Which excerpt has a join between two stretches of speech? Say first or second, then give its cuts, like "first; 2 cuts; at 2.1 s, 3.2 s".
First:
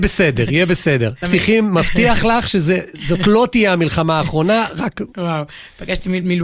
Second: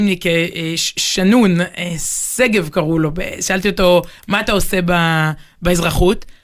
first; 1 cut; at 1.2 s